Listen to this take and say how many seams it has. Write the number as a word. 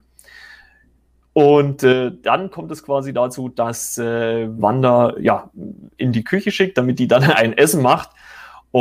one